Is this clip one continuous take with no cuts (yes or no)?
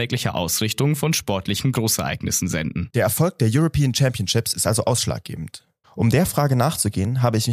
no